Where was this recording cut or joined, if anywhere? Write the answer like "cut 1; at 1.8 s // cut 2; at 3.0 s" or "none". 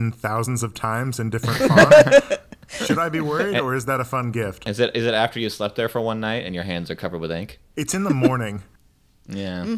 none